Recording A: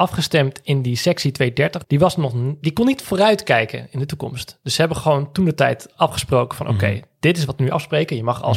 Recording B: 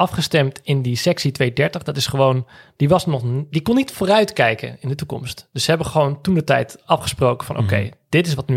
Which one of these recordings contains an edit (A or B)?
A